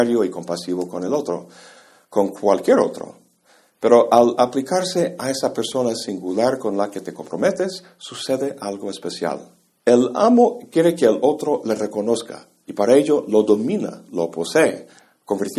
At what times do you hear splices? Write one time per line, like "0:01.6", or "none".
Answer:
0:09.8